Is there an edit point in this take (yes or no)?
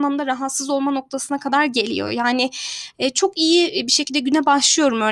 no